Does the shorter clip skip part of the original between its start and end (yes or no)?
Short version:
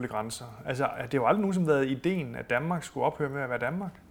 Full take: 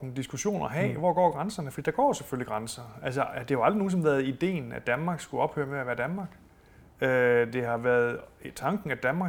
no